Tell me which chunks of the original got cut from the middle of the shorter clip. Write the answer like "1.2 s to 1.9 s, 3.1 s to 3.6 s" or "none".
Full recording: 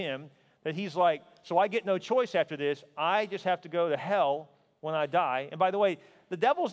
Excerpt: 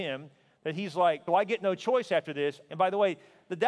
1.3 s to 1.5 s, 2.9 s to 5.5 s

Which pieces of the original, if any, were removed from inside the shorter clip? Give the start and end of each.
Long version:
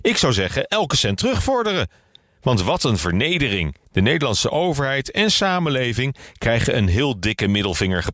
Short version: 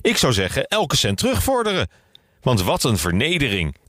none

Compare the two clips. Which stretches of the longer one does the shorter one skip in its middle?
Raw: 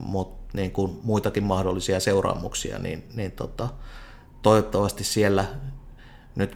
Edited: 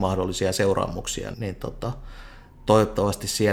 2.8 s to 3.1 s

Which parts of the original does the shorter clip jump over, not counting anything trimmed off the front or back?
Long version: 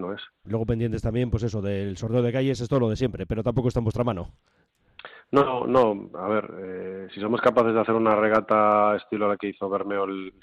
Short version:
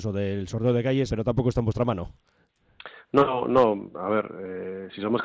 2.6 s to 3.3 s

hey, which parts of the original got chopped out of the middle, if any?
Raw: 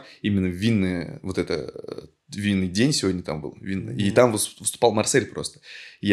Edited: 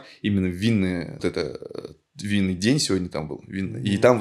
1.2 s to 1.3 s

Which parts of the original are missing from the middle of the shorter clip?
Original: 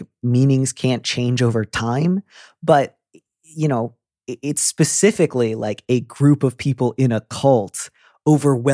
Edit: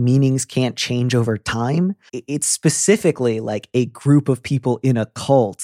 2.4 s to 4.2 s

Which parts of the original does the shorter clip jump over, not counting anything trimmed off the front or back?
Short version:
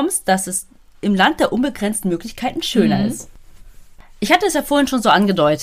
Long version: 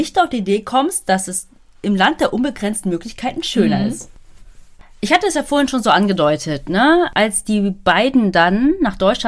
none

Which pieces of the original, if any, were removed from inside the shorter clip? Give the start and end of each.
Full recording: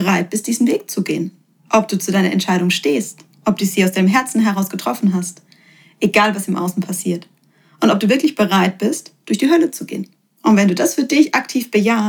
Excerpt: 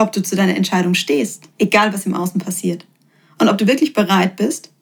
3.3 s to 5.9 s

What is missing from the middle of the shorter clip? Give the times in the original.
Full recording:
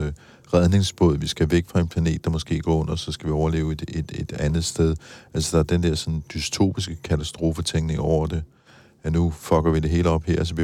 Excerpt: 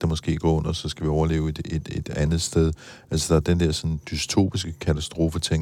none

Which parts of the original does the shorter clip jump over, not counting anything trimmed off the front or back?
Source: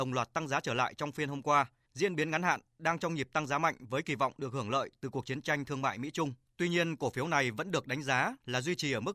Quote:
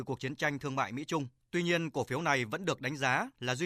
none

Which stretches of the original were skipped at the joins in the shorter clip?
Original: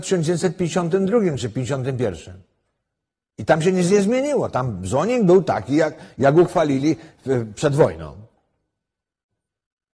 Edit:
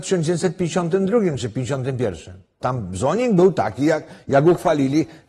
2.6 s to 4.5 s

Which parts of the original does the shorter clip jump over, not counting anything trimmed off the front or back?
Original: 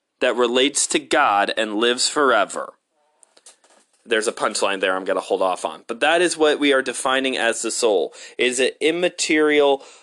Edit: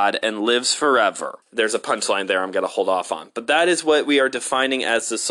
2.8 s to 4.0 s

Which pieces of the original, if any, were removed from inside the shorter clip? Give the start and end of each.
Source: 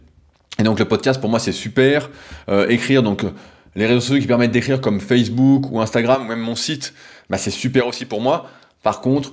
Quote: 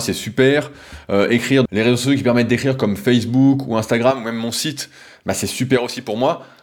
3.0 s to 3.7 s

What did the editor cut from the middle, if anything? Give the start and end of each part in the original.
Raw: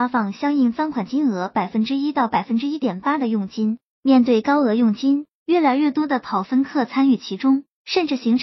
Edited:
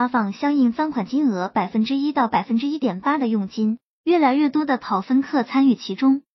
3.9 s to 5.3 s

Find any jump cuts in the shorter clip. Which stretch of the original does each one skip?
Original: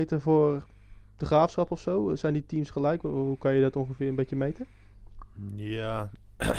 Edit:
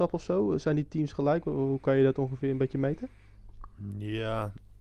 none

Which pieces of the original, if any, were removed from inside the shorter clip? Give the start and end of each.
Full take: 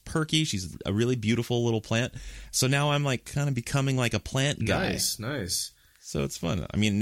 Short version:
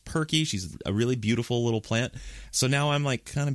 none

